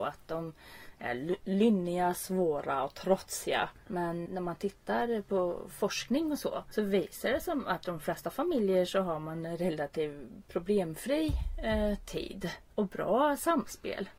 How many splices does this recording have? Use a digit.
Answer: 1